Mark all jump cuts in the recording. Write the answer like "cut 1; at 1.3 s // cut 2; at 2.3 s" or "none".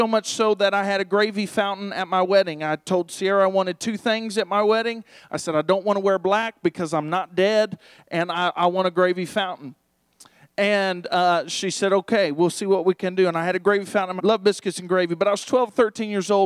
cut 1; at 14.2 s